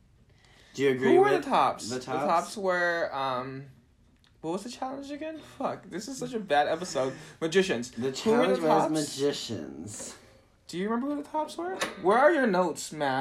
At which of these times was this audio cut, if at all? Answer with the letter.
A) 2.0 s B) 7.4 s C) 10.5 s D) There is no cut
D